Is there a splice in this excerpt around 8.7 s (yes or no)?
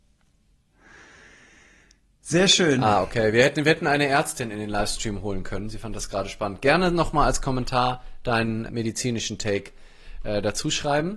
yes